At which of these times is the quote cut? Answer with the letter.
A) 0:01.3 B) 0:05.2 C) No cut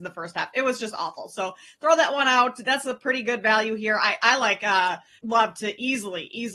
B